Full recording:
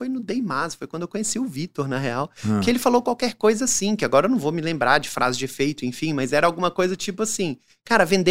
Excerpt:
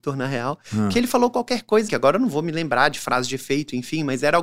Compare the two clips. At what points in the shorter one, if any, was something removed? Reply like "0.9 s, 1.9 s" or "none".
1.9 s